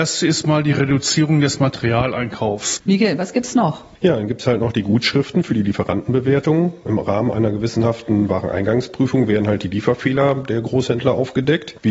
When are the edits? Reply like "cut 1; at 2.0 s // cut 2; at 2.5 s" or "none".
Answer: cut 1; at 2.8 s

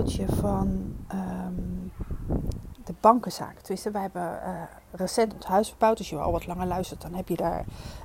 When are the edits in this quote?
cut 1; at 2.7 s

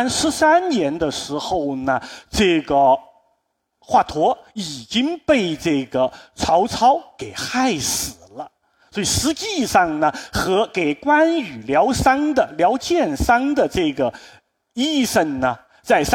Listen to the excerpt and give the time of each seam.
none

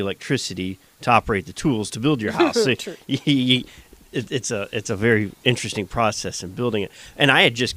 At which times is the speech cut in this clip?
none

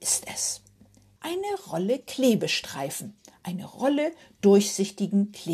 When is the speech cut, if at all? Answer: cut 1; at 1.2 s

